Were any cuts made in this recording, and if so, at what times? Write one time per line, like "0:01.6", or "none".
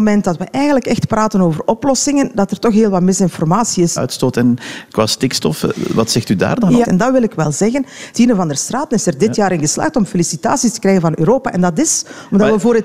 0:04.0
0:06.8
0:08.1

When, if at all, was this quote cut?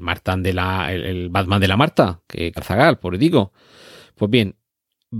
0:02.6

